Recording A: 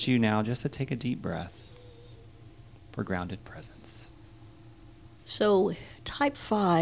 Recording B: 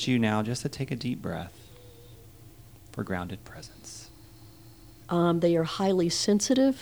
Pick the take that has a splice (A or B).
B